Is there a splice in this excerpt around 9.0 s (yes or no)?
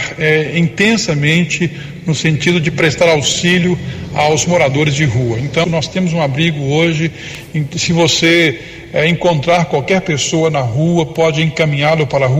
no